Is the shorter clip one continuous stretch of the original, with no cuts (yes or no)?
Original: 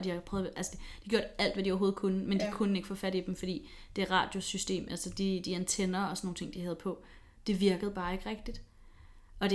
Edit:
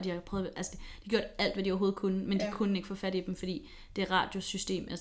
yes